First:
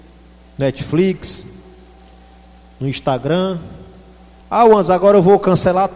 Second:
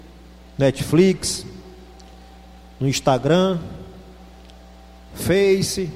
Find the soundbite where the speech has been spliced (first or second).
first